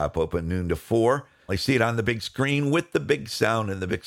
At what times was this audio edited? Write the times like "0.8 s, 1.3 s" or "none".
1.5 s

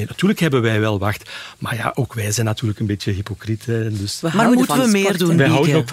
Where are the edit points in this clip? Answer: 4.2 s

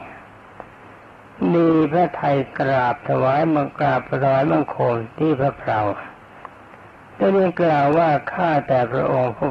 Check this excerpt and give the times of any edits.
none

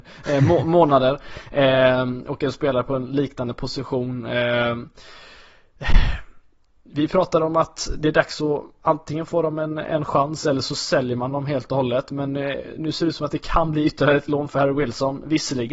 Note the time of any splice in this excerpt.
none

